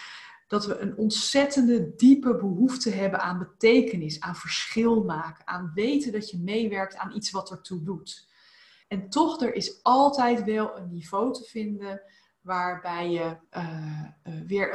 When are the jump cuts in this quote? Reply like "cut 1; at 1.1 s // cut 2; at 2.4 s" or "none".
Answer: cut 1; at 8.8 s // cut 2; at 13.4 s